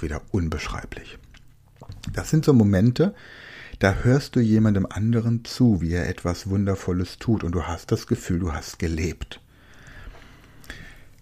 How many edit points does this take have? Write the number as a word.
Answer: zero